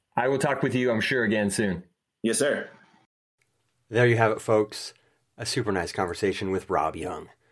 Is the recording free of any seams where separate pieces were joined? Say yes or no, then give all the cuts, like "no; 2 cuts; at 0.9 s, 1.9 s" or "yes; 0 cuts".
yes; 0 cuts